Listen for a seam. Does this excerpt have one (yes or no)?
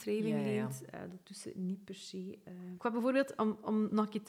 no